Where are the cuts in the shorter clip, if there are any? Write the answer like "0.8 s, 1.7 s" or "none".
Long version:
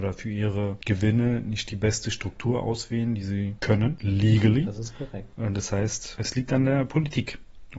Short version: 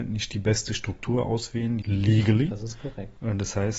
1.8 s